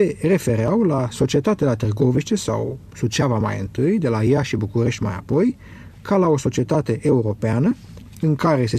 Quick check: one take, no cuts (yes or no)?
yes